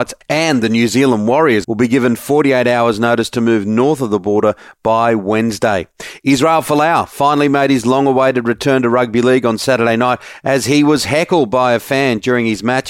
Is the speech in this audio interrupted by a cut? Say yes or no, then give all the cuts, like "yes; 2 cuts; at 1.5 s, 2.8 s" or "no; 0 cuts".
yes; 1 cut; at 1.6 s